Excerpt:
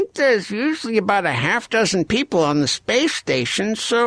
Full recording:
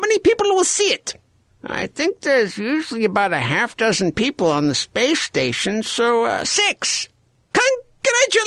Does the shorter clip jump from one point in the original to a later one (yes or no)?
no